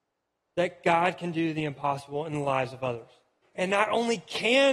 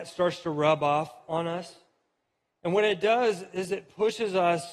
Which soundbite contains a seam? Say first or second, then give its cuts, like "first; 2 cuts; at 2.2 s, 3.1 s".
first; 1 cut; at 3.4 s